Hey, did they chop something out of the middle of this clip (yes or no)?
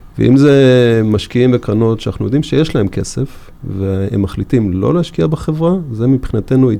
no